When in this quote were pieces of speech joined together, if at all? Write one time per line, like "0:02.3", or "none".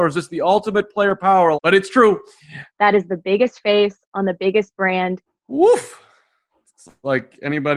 0:01.5
0:02.7
0:05.3